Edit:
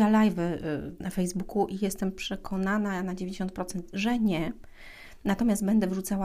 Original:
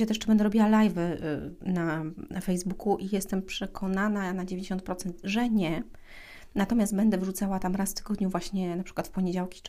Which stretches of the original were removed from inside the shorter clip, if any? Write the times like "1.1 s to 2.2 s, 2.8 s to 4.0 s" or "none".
1.6 s to 2.3 s